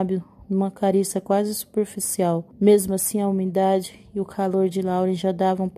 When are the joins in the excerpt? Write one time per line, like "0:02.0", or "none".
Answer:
0:02.5